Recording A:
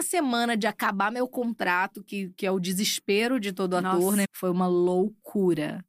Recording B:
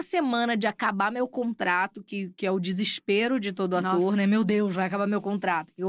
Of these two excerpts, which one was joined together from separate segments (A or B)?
A